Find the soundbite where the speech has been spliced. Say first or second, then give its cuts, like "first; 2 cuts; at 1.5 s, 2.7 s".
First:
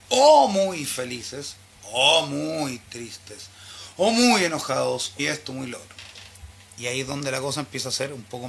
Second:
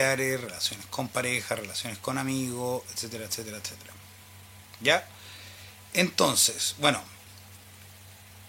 first; 1 cut; at 5.2 s